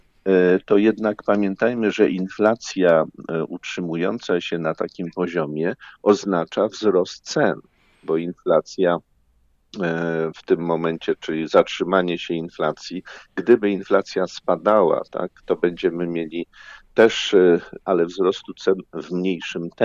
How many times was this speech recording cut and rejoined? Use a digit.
3